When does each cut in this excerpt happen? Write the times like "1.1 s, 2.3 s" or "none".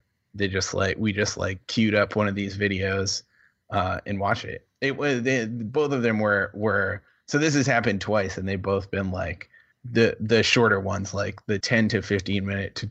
9.7 s, 11.6 s